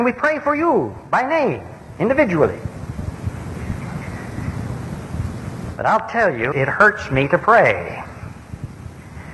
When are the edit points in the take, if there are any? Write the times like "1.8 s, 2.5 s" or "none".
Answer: 6.5 s